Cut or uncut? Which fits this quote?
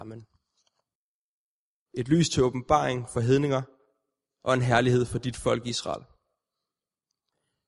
cut